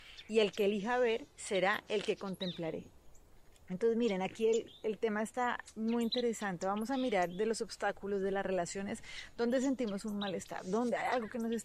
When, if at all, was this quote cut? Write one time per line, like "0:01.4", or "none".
none